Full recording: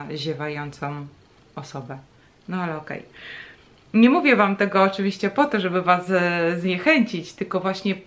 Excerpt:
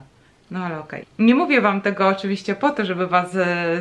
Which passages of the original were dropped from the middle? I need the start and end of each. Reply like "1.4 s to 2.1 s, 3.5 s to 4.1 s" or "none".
3.0 s to 3.8 s